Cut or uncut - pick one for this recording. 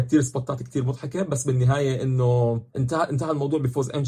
cut